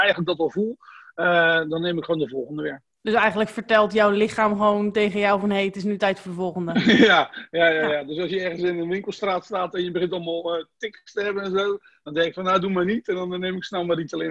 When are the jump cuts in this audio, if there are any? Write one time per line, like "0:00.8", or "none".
none

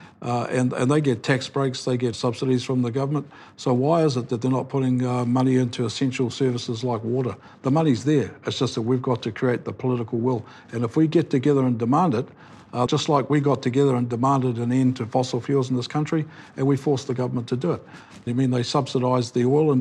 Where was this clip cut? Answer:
0:12.9
0:18.3

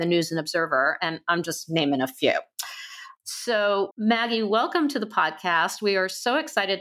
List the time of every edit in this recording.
0:03.9

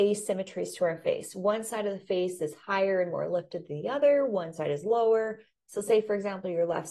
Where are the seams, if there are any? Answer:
none

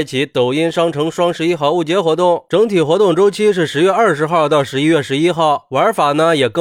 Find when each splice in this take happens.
none

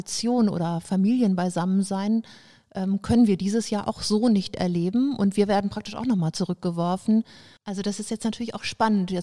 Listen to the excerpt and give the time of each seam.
0:07.6

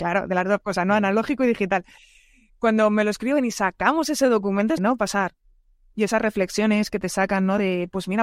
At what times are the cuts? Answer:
0:04.8

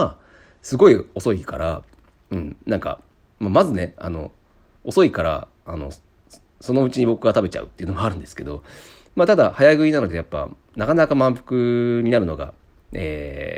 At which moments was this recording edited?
none

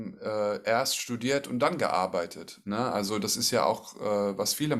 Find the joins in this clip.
none

